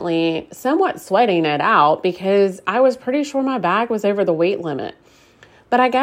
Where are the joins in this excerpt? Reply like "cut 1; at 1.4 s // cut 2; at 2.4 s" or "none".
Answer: none